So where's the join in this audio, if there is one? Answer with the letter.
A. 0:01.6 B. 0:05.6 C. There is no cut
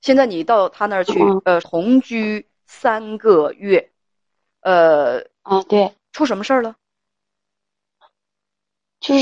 A